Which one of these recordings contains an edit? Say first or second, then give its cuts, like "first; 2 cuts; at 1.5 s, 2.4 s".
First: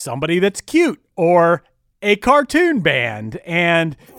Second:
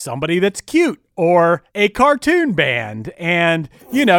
second; 1 cut; at 1.7 s